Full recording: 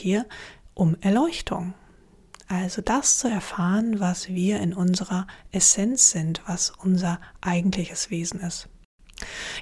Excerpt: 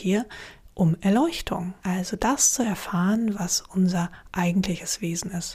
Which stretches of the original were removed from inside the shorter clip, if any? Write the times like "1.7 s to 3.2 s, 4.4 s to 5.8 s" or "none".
1.8 s to 2.4 s, 4.0 s to 6.4 s